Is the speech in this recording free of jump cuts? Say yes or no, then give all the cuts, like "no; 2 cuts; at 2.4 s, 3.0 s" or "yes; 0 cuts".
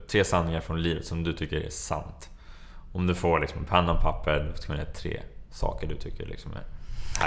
yes; 0 cuts